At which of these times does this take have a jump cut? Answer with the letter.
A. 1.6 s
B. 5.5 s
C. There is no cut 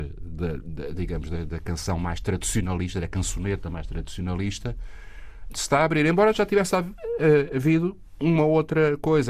B